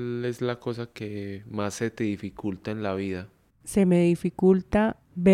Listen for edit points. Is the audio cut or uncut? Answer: uncut